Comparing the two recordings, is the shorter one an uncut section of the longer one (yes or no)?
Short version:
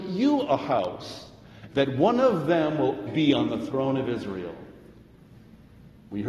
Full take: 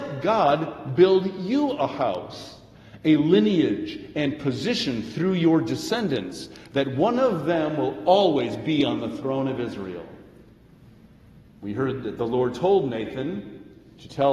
no